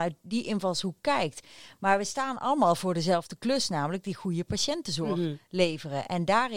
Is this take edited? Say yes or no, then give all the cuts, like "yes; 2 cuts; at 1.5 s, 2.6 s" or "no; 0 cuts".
no; 0 cuts